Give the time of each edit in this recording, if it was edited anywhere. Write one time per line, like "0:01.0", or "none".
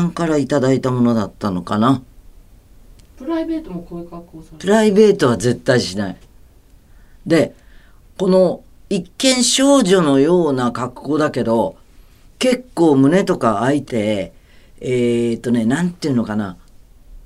0:13.9